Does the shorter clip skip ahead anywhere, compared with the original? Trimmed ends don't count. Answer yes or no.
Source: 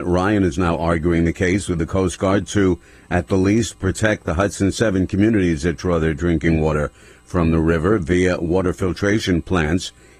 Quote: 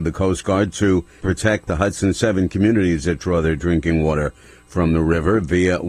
yes